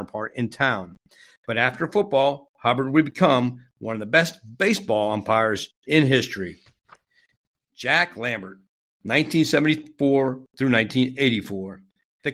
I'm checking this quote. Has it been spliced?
no; 0 cuts

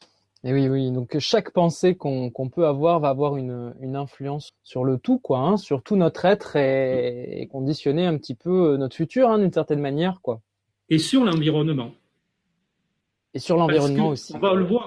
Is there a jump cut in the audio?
yes; 1 cut; at 4.5 s

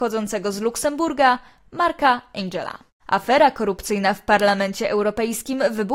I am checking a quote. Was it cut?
no; 0 cuts

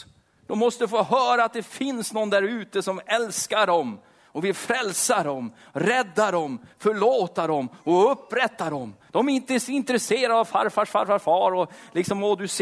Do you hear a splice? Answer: no; 0 cuts

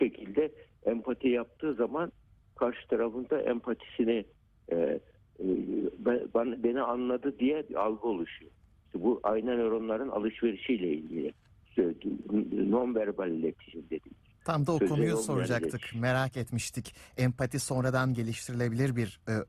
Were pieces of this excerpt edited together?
no; 0 cuts

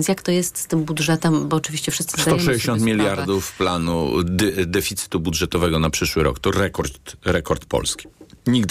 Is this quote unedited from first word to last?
yes; 0 cuts

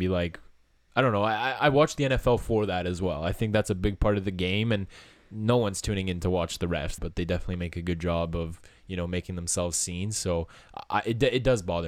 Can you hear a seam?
yes; 1 cut; at 7.0 s

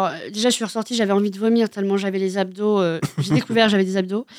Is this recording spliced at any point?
no; 0 cuts

